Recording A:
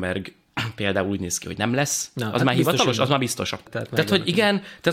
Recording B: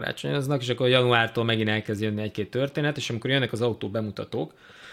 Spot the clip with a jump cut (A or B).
A